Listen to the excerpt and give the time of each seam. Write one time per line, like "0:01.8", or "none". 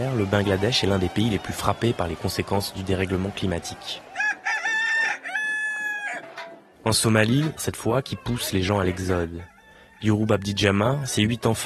0:07.6